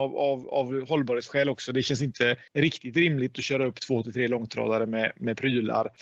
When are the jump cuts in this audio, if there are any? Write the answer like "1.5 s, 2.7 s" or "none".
none

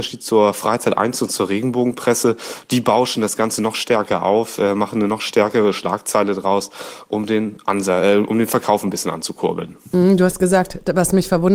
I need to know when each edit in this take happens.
none

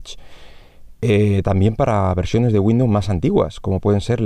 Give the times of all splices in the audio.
none

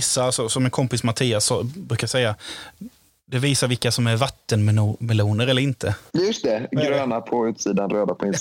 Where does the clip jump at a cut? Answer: 6.1 s

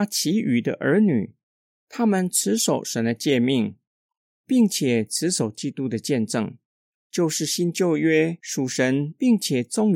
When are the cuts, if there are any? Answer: 6.9 s

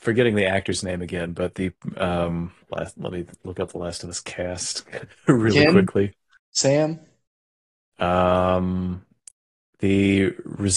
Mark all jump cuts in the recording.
2.6 s

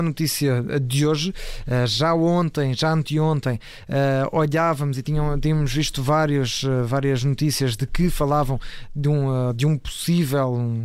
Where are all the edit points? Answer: none

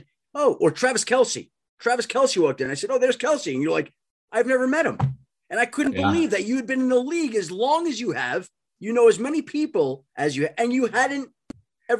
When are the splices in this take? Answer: none

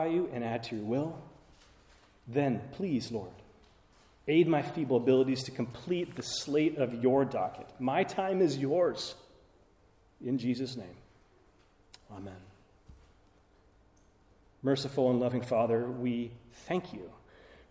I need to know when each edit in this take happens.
none

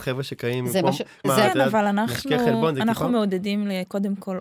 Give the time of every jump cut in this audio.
1.2 s

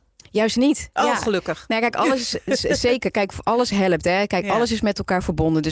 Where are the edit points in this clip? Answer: none

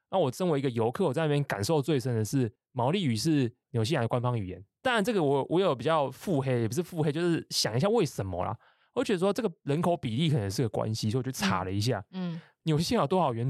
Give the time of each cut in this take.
none

